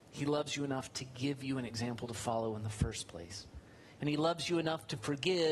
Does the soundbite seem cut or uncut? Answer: cut